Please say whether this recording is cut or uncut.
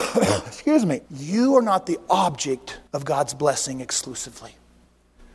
cut